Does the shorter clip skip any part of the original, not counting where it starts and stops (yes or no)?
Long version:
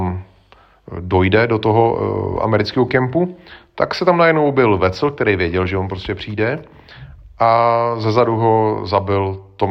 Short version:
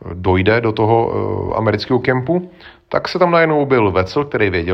no